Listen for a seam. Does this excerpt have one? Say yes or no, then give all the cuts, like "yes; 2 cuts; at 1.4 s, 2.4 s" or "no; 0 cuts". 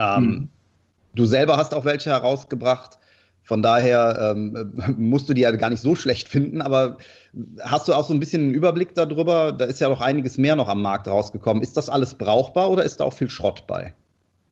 no; 0 cuts